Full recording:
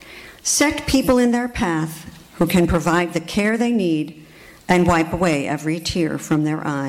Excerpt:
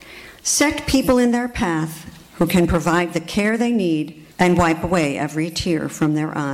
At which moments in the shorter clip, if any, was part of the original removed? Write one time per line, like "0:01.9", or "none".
0:04.3